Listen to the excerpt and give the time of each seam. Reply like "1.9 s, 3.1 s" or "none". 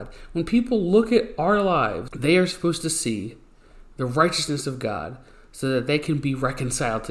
2.1 s